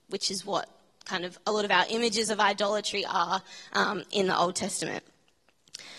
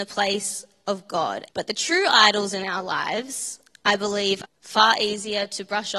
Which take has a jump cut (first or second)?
second